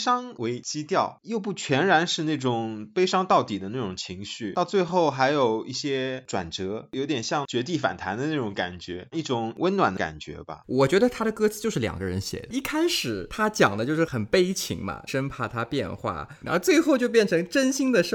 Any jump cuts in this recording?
yes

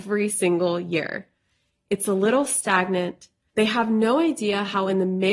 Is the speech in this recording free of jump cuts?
no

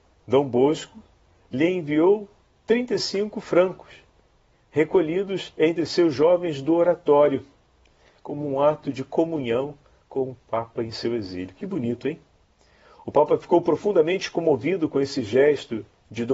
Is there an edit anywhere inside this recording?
no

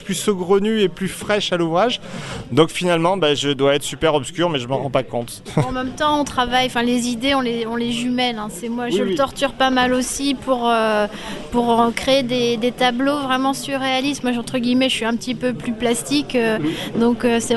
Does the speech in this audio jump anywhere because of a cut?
no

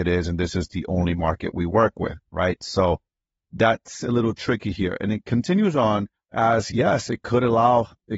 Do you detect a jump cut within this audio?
yes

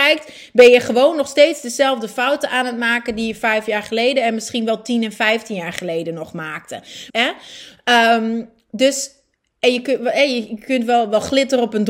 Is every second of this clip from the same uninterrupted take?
no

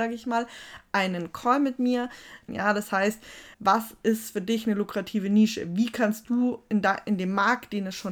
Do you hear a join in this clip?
yes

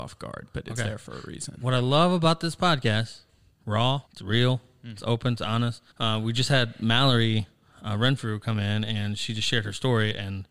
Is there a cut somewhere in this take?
yes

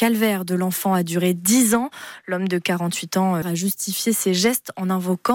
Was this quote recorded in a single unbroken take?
no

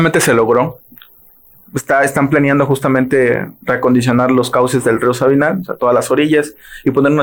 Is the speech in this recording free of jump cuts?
yes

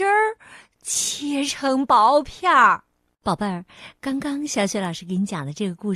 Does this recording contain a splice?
yes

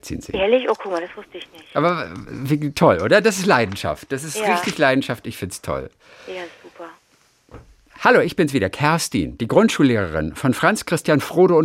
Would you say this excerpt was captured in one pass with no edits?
yes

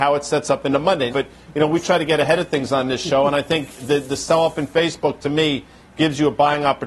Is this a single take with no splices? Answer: no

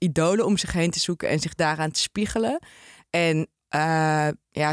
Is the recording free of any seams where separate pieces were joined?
yes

